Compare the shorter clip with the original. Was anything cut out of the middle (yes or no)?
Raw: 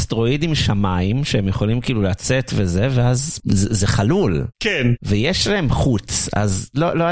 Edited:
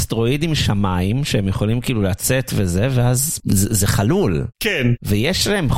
no